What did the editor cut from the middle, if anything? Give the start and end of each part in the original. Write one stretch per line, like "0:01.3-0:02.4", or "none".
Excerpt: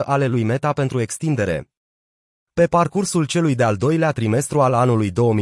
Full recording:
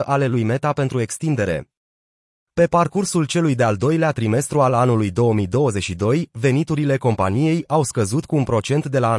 none